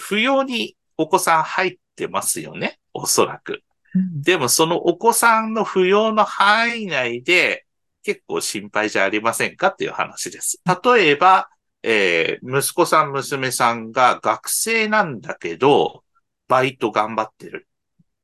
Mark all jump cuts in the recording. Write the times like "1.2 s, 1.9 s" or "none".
8.0 s, 10.7 s